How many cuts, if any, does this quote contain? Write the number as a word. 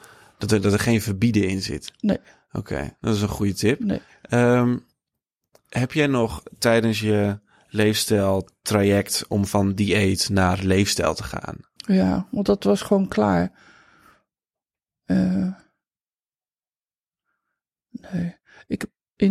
one